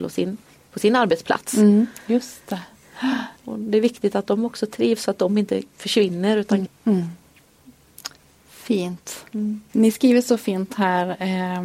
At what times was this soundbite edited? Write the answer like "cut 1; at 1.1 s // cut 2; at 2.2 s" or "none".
cut 1; at 3.4 s // cut 2; at 6.6 s // cut 3; at 9.7 s